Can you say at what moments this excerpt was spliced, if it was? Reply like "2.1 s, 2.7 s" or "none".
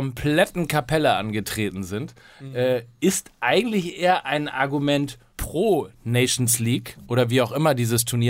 5.3 s